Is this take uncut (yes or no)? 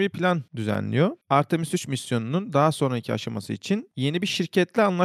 yes